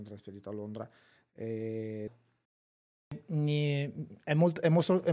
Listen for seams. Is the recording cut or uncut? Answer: cut